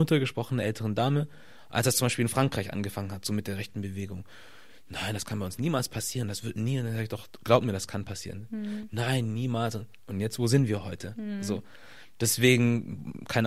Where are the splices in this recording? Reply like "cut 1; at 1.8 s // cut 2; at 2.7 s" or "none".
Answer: none

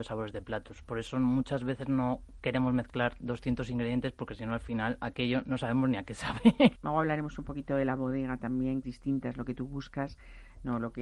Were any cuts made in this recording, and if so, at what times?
cut 1; at 6.7 s // cut 2; at 8.8 s

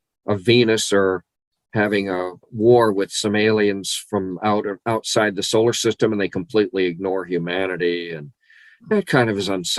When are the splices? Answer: cut 1; at 2.4 s

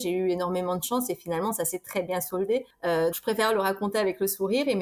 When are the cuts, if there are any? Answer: cut 1; at 3.1 s

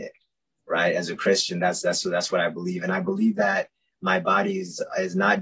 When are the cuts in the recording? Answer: none

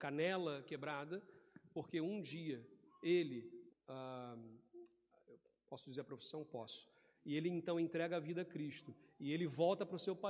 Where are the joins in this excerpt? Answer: cut 1; at 3.7 s // cut 2; at 7.1 s

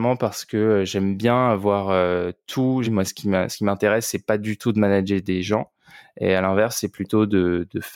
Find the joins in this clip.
cut 1; at 2.8 s

